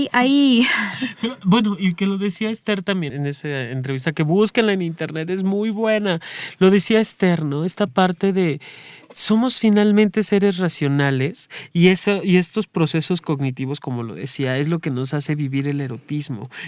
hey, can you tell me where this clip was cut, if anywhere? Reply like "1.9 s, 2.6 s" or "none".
3.1 s